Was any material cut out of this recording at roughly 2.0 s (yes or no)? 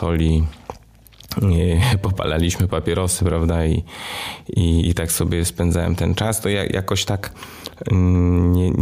no